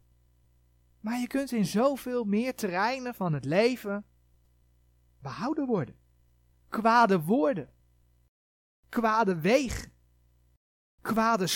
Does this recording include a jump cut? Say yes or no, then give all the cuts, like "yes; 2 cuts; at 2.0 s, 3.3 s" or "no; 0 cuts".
yes; 1 cut; at 6.5 s